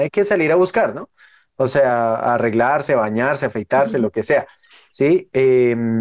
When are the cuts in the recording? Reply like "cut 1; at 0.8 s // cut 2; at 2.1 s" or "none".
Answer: none